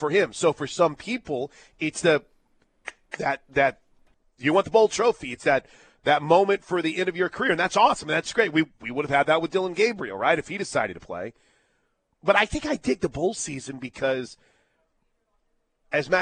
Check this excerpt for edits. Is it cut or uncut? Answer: uncut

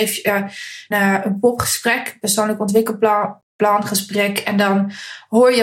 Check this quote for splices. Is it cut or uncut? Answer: cut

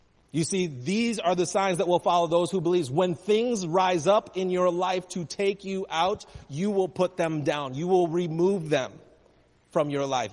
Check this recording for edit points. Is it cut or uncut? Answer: uncut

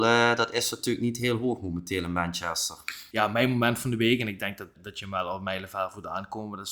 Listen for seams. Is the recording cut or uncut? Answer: cut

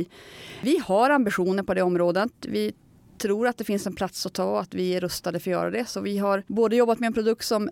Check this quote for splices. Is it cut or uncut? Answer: uncut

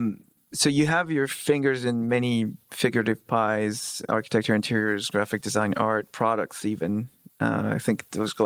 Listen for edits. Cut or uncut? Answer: uncut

